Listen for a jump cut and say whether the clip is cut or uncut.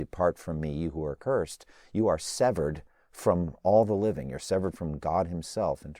uncut